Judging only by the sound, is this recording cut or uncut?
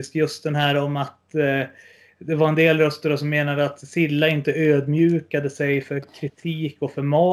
uncut